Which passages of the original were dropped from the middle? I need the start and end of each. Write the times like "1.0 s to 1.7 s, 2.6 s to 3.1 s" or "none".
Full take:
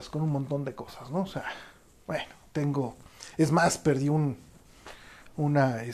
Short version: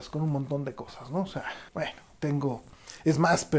1.7 s to 2.0 s